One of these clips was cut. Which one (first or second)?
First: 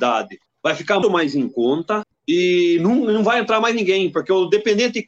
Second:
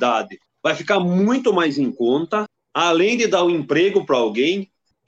first